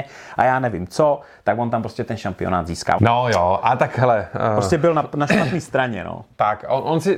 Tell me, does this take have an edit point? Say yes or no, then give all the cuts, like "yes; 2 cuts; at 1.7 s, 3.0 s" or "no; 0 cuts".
yes; 1 cut; at 3.0 s